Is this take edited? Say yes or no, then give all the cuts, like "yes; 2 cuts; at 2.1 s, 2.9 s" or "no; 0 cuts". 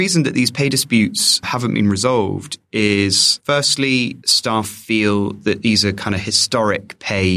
no; 0 cuts